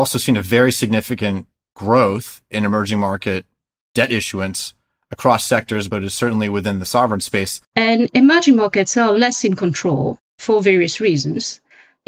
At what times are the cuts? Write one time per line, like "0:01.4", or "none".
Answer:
0:07.6